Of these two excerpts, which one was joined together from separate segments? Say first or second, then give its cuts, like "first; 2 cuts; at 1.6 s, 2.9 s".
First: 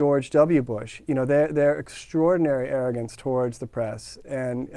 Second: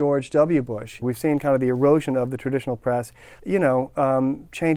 second; 2 cuts; at 1.0 s, 3.4 s